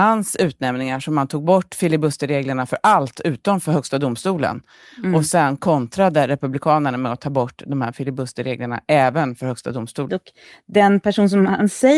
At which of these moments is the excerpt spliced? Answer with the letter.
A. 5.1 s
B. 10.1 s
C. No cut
B